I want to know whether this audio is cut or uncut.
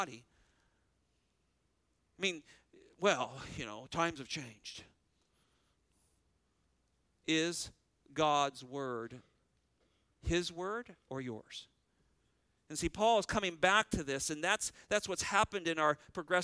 uncut